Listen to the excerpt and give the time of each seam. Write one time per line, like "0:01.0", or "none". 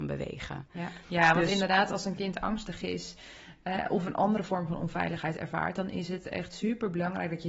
none